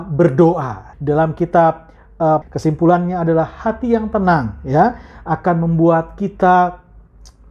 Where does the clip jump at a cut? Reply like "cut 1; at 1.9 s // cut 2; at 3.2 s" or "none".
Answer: cut 1; at 0.9 s // cut 2; at 2.4 s

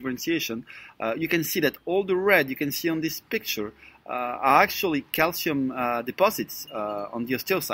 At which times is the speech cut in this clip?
none

